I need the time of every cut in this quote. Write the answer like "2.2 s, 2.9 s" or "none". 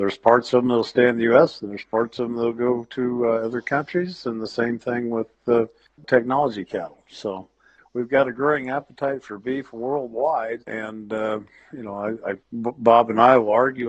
10.6 s, 12.4 s

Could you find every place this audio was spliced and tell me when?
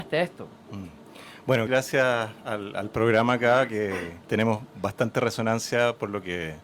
1.7 s, 4.2 s

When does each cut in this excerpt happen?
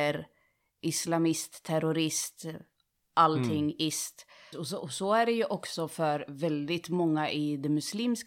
4.5 s

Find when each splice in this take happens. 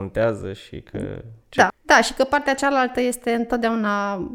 1.7 s

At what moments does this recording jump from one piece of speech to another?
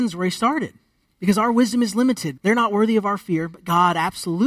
1.1 s, 2.4 s

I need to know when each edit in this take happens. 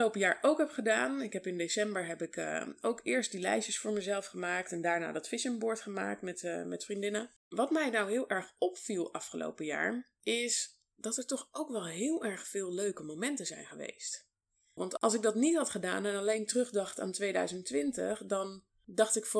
14.8 s

